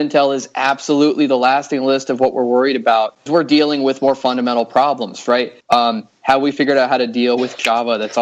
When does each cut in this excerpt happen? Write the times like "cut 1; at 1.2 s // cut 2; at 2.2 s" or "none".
cut 1; at 3.3 s // cut 2; at 5.6 s